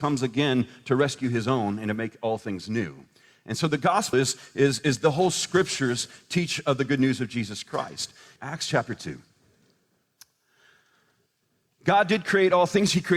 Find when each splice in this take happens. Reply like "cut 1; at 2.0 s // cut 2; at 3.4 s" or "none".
cut 1; at 4.1 s // cut 2; at 8.4 s